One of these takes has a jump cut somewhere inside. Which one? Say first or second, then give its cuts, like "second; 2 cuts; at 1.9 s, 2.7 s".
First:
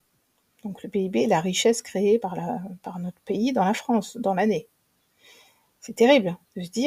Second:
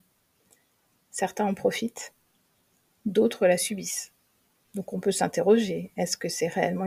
first; 1 cut; at 2.2 s